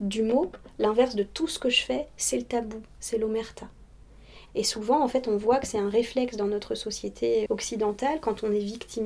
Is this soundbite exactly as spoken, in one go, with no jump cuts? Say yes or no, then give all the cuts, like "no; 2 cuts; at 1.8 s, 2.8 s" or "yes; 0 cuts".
no; 2 cuts; at 4.5 s, 7.5 s